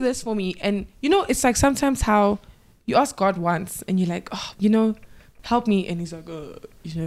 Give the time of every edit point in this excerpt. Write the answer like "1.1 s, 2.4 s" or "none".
4.5 s